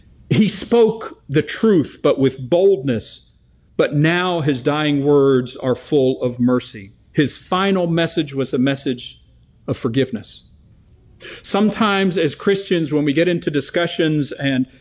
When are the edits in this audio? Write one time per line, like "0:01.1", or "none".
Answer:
none